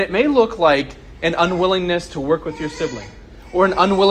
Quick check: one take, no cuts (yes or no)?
yes